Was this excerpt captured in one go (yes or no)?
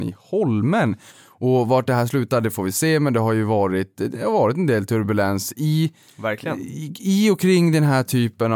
no